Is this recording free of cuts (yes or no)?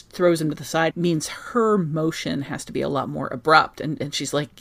no